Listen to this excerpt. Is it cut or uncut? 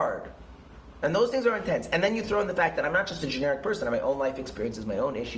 uncut